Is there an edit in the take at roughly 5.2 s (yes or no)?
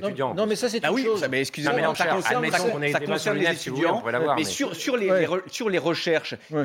no